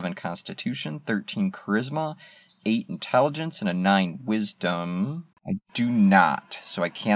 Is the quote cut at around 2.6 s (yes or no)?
no